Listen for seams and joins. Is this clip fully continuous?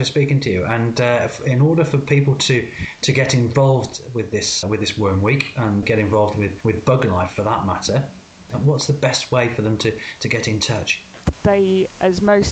no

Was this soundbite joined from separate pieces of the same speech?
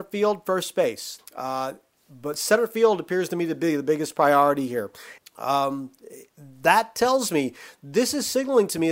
yes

